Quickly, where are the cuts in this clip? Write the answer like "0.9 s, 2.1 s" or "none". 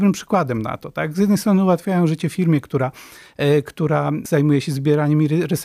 none